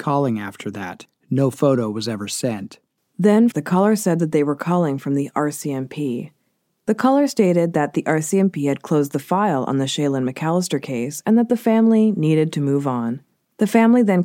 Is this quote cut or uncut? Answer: cut